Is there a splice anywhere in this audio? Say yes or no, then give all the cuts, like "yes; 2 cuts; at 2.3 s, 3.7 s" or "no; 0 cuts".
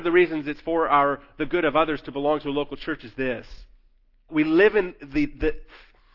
yes; 1 cut; at 4.3 s